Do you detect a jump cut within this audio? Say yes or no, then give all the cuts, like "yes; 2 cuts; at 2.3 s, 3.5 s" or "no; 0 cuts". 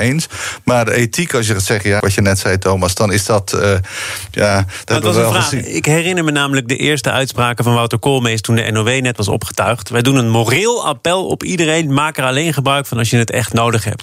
yes; 1 cut; at 2.0 s